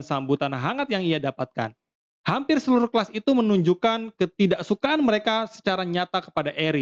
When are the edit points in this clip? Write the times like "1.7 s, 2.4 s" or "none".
none

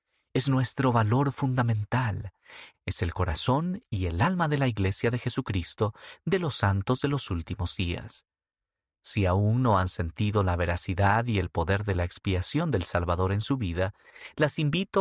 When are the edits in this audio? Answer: 2.7 s

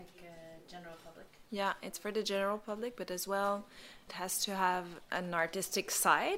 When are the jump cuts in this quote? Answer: none

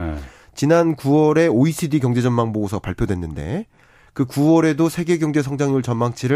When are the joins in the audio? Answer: none

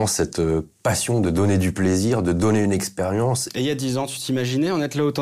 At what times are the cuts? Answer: 3.5 s

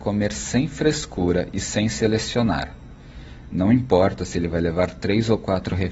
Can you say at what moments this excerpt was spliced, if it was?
none

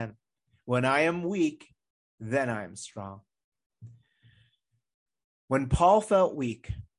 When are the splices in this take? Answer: none

